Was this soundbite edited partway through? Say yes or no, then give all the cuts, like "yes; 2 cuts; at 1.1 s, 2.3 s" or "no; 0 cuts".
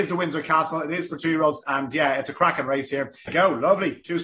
yes; 2 cuts; at 1.6 s, 3.3 s